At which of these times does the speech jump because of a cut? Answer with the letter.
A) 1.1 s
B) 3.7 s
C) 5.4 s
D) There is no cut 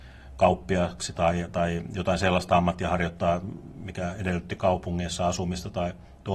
D